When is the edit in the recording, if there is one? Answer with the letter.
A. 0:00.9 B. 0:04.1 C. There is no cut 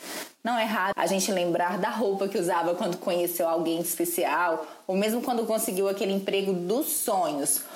A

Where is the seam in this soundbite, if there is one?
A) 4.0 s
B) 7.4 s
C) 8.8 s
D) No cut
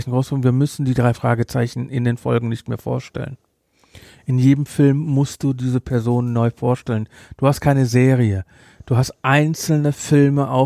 D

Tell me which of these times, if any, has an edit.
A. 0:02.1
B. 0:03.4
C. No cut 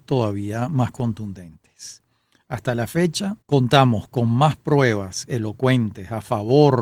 B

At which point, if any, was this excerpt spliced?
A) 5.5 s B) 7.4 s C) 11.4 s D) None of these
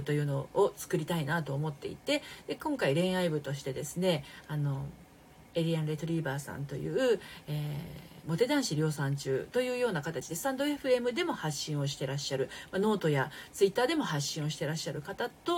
D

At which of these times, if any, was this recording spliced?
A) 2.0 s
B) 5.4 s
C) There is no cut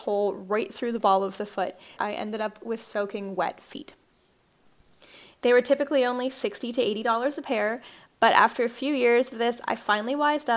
A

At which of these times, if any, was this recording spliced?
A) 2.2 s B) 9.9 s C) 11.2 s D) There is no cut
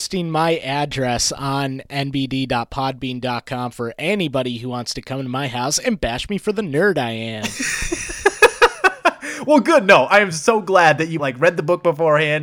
C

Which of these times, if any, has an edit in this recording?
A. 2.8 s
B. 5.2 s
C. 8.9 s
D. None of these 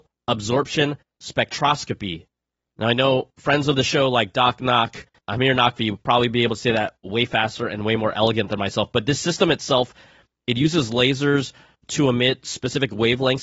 B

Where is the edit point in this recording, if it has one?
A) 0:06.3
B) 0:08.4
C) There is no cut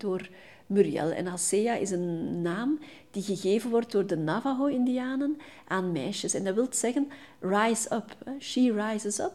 C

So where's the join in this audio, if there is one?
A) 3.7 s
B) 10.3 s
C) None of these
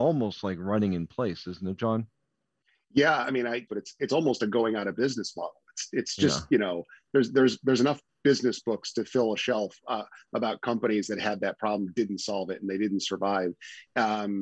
A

